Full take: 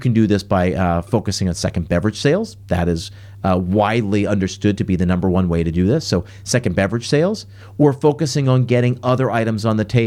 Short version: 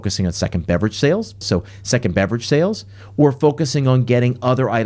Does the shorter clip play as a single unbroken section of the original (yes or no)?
no